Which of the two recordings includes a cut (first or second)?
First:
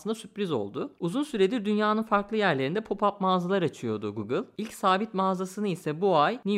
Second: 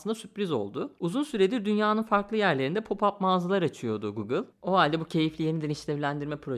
second